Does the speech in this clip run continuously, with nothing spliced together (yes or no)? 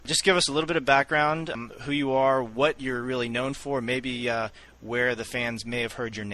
yes